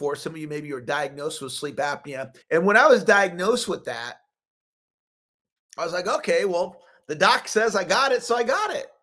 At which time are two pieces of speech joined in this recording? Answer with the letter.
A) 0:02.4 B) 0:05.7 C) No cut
A